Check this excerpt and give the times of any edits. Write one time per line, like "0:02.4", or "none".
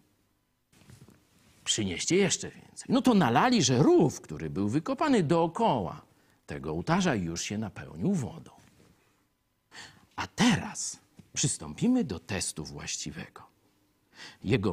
none